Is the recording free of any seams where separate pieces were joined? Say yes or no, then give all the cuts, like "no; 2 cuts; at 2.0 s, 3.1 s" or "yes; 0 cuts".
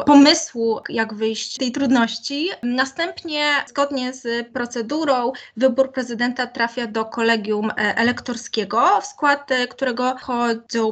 yes; 0 cuts